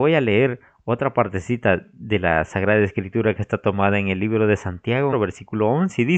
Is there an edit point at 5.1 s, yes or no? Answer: yes